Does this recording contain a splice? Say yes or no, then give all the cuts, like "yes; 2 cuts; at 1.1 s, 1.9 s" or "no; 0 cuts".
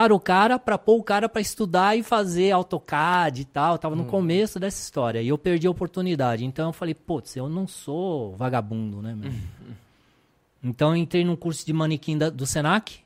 no; 0 cuts